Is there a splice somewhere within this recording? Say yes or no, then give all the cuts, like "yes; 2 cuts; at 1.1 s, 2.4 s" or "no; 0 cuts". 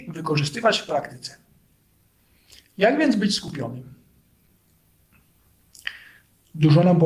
no; 0 cuts